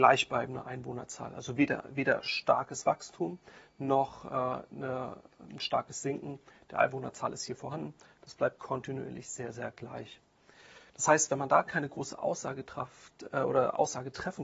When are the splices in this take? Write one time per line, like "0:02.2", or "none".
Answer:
0:10.9

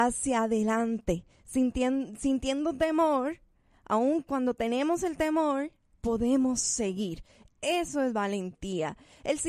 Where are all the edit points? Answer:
none

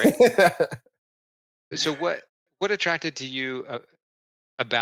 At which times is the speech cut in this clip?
0:01.7

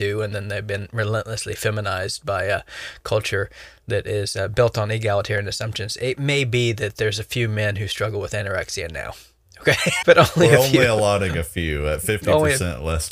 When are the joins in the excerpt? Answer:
0:10.0

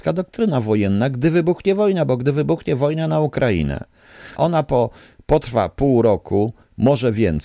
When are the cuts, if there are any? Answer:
0:04.4

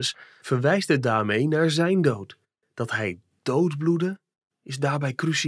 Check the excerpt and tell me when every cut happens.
0:02.6

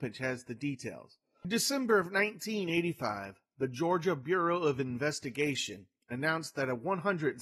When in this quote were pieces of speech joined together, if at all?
none

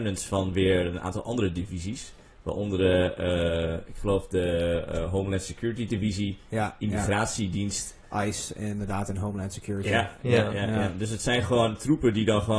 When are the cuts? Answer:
none

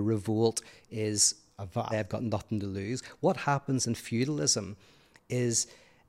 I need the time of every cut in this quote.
0:01.9

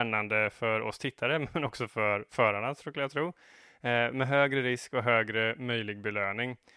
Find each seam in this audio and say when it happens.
none

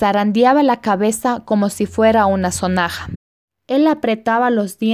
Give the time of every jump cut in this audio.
none

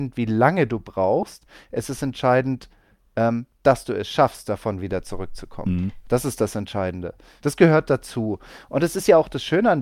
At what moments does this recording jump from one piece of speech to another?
none

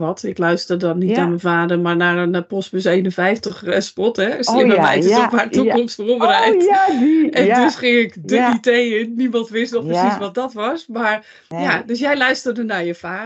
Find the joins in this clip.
none

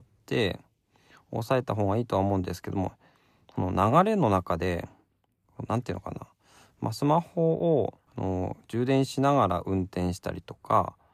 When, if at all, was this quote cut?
0:08.1

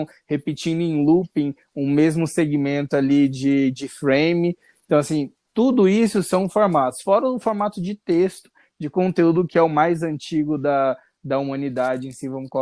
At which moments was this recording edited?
none

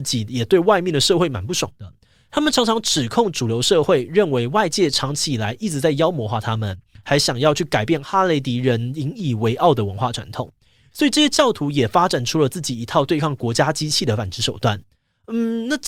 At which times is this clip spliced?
none

